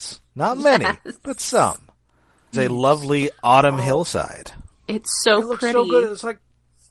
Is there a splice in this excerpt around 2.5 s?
yes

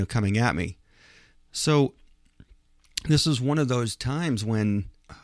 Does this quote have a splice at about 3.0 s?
no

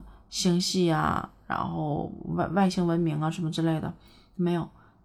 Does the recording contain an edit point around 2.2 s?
no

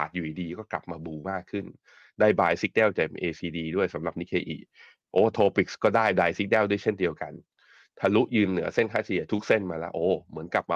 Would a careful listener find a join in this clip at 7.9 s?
no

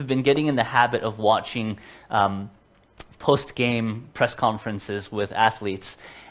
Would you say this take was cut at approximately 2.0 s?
no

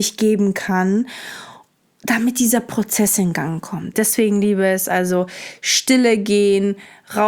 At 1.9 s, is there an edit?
no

